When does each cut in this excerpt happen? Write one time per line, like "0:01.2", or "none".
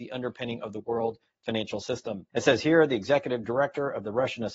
0:02.3